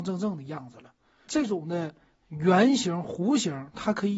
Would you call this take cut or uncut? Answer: cut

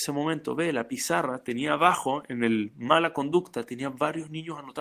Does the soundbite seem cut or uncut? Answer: uncut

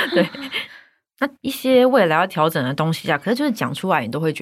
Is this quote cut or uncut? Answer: cut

